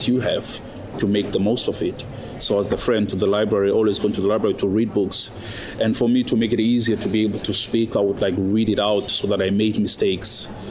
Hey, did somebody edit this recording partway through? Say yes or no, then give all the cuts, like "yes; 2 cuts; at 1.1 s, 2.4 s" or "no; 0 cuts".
no; 0 cuts